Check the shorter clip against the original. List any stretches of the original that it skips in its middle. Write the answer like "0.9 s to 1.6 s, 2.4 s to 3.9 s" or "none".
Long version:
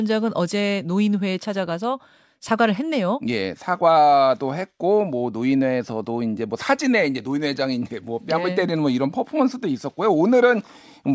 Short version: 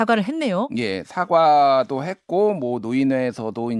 none